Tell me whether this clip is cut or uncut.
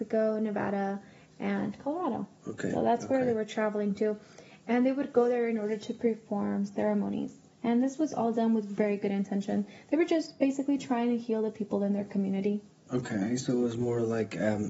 uncut